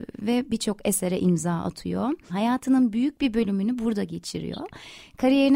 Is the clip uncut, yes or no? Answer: no